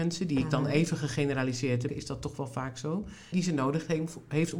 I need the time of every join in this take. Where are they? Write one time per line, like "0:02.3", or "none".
0:01.9
0:03.3